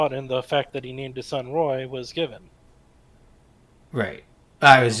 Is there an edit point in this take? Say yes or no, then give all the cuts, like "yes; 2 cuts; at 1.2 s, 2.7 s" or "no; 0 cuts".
no; 0 cuts